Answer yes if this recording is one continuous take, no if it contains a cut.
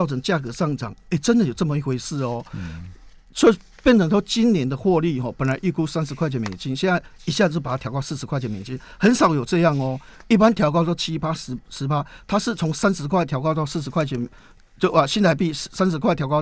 yes